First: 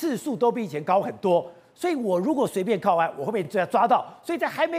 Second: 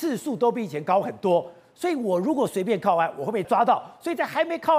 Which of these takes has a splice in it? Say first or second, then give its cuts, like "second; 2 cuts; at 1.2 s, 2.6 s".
second; 1 cut; at 3.4 s